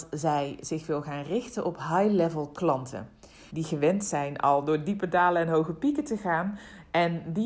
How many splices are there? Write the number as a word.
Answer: one